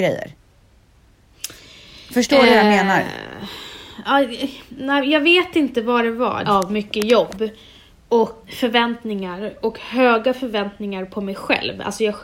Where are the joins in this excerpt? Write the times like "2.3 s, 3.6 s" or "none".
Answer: 6.4 s, 8.4 s